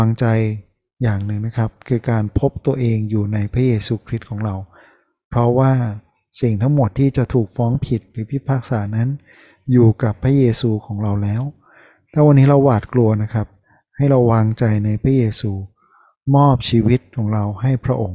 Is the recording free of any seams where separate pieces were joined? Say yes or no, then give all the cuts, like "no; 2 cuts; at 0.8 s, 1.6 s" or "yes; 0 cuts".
yes; 0 cuts